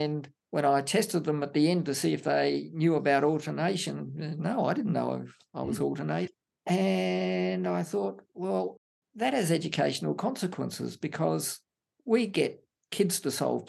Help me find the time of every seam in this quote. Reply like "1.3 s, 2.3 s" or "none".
none